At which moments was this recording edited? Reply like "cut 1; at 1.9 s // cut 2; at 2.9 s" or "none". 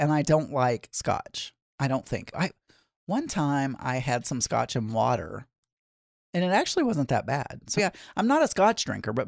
cut 1; at 2.3 s // cut 2; at 7.8 s